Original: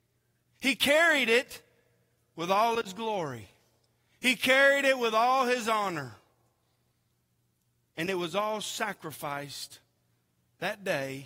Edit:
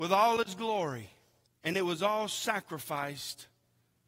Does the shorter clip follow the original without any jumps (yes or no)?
no